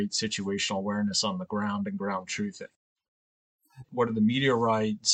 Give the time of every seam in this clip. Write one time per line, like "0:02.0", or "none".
0:03.8